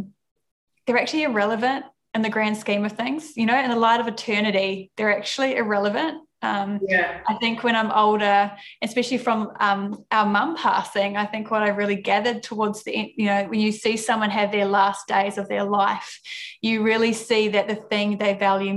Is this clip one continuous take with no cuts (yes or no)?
yes